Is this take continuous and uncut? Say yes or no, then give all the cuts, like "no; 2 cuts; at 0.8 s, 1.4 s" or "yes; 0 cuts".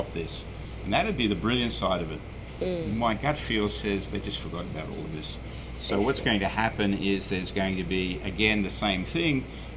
yes; 0 cuts